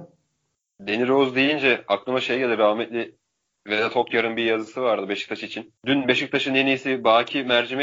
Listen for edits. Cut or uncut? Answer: cut